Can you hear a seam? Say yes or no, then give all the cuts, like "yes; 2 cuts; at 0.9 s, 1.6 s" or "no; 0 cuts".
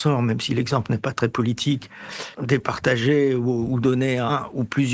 yes; 1 cut; at 2.3 s